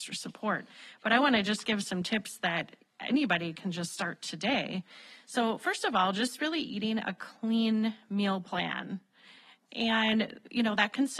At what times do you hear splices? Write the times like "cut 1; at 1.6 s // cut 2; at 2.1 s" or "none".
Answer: none